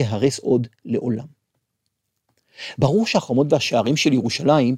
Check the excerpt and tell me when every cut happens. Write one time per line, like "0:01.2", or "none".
none